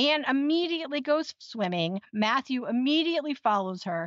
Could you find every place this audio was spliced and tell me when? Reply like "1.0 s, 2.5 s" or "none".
none